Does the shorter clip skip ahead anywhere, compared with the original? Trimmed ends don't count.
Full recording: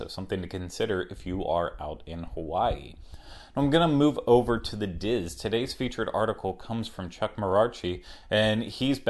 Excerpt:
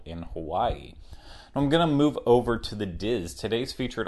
no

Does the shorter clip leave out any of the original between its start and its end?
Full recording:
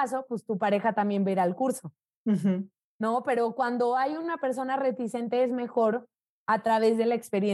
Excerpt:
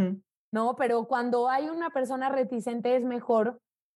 no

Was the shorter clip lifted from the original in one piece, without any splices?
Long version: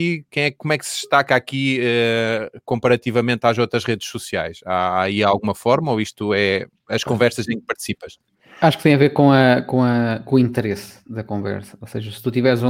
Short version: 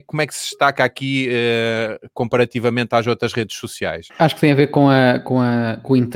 no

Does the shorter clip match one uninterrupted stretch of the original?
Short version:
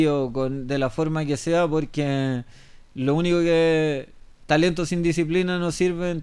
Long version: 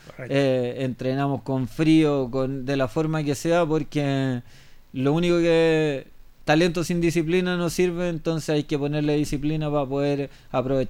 yes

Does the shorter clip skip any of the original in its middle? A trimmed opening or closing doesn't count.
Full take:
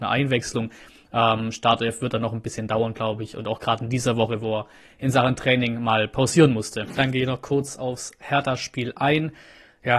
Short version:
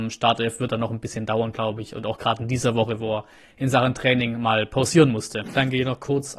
no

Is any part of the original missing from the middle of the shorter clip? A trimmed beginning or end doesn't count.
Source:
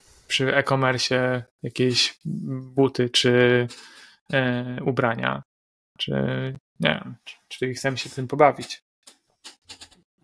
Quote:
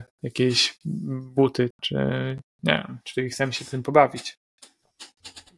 yes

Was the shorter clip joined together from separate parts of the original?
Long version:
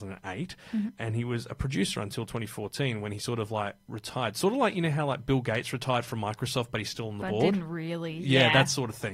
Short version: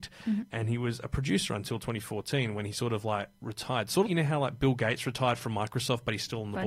yes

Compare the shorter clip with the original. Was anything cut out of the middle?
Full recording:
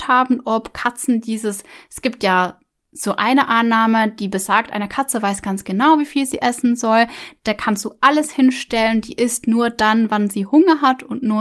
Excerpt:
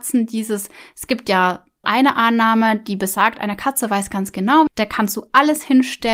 yes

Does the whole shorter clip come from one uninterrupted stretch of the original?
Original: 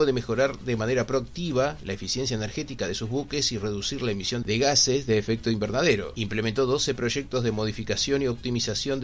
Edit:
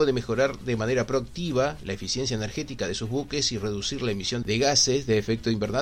yes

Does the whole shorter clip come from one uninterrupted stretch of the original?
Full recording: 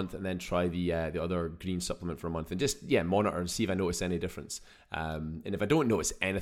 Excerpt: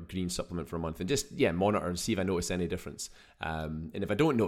yes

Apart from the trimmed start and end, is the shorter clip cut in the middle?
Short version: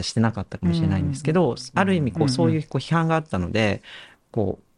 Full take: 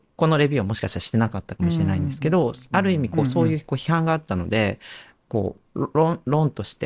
no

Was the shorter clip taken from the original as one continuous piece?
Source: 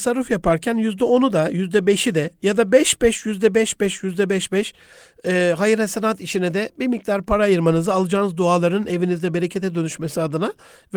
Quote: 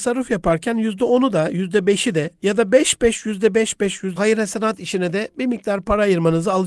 no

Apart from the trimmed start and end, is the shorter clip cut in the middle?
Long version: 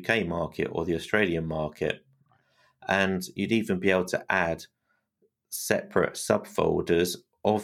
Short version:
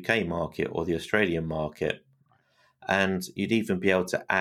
no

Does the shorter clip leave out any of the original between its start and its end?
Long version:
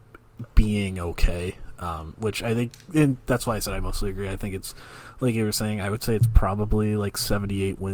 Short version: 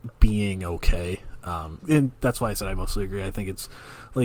yes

